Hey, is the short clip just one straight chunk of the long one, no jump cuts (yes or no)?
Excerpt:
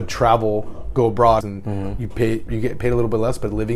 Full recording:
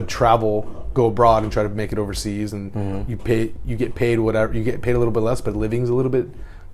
no